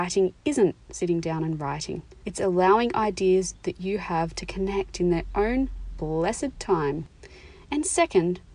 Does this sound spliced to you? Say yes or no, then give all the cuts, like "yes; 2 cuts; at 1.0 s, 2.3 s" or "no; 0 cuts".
yes; 1 cut; at 2.2 s